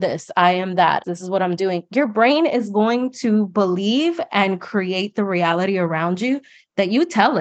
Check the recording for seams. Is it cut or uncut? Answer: cut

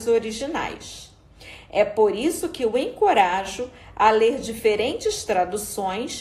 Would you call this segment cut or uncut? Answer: uncut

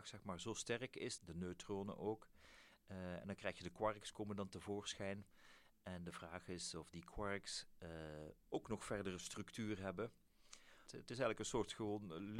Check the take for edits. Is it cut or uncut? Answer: cut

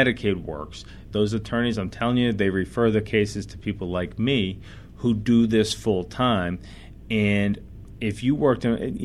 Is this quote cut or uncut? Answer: cut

